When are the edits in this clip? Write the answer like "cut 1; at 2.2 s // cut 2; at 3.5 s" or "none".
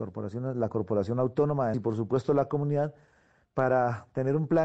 cut 1; at 1.7 s